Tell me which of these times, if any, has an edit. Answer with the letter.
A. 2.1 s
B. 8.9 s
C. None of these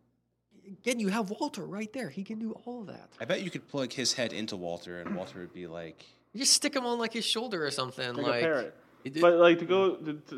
C